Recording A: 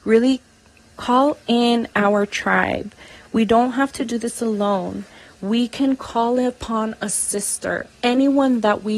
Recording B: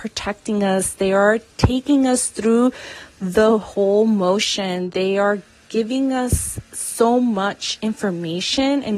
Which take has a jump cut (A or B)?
A